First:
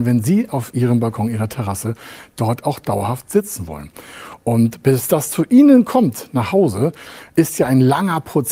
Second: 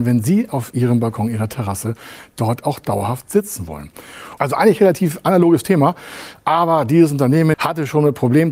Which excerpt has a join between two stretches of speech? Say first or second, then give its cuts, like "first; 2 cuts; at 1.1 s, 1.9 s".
second; 2 cuts; at 4.4 s, 7.5 s